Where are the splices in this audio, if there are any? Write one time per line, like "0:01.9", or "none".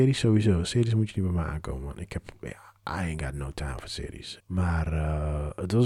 0:04.4